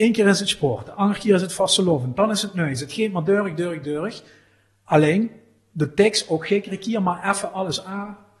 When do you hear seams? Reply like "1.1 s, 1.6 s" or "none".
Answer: none